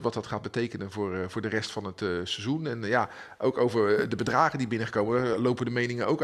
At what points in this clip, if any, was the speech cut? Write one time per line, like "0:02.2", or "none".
none